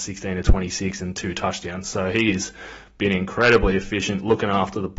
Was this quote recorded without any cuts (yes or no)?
yes